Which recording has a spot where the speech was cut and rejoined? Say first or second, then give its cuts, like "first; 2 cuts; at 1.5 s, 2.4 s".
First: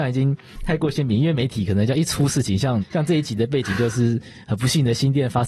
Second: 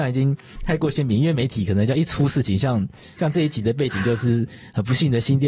first; 1 cut; at 2.8 s